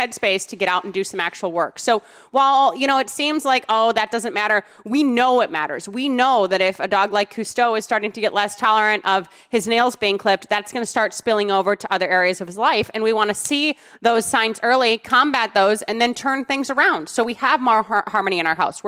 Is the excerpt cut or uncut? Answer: uncut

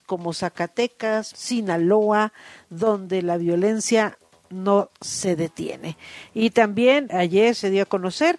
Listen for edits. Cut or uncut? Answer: cut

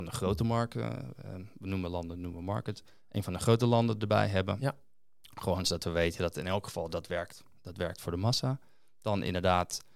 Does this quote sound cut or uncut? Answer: uncut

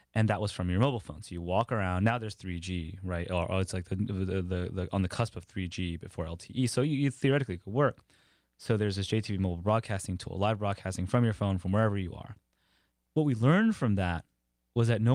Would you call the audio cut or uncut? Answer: uncut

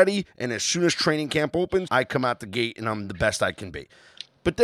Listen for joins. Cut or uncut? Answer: cut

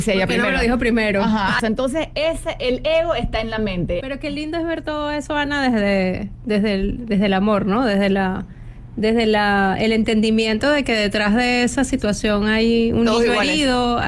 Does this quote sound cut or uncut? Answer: cut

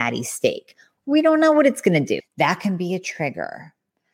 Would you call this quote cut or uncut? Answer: cut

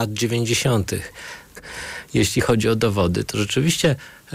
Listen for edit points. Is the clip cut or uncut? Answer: cut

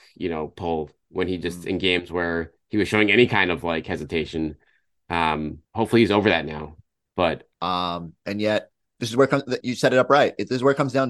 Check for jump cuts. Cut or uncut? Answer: cut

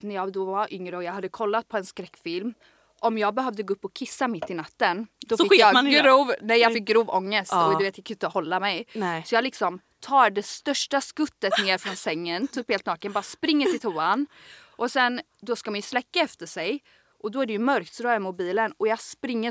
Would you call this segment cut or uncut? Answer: uncut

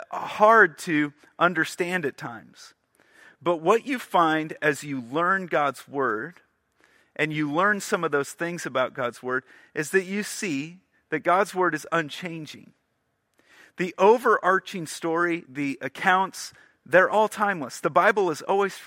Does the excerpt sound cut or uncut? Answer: cut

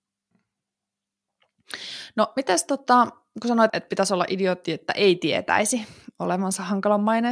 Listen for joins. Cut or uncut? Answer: cut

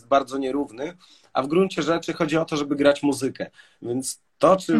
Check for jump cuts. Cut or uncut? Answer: uncut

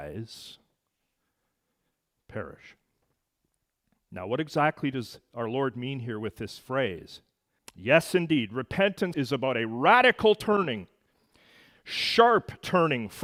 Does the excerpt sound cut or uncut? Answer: cut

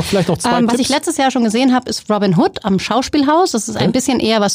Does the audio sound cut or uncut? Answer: uncut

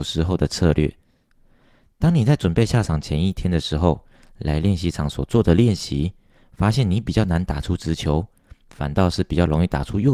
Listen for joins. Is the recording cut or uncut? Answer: uncut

